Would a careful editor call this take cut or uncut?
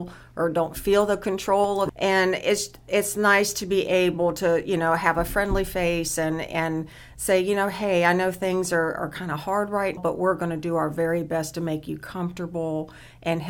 cut